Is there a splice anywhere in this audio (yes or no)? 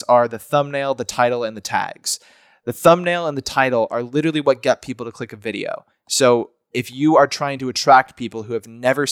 no